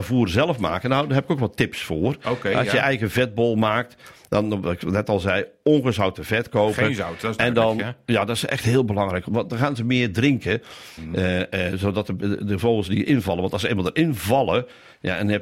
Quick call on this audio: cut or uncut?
cut